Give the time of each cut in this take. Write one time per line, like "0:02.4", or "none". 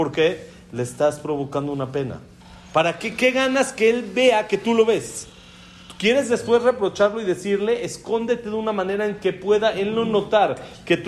none